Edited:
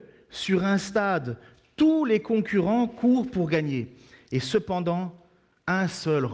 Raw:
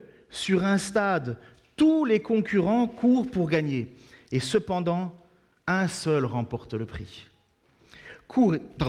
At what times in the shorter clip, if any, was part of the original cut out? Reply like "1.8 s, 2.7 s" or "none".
none